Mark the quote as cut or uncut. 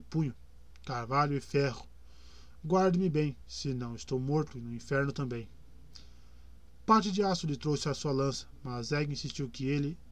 uncut